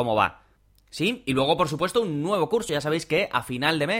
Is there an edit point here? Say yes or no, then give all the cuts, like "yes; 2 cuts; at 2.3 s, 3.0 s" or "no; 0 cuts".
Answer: no; 0 cuts